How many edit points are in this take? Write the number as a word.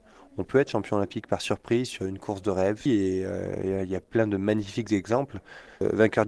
one